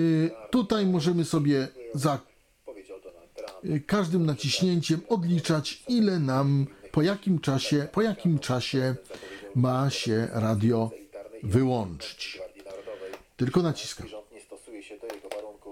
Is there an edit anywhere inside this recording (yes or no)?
yes